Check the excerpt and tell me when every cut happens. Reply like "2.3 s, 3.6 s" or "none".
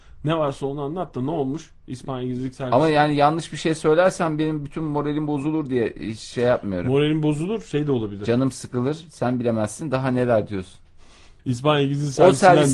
11.4 s